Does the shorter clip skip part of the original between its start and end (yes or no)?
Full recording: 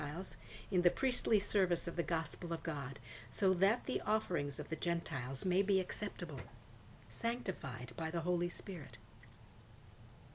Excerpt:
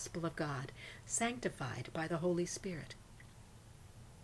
yes